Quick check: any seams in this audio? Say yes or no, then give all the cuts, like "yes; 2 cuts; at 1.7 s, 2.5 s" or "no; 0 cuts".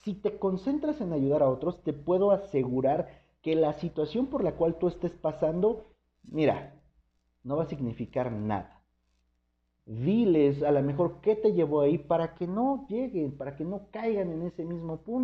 yes; 1 cut; at 9.8 s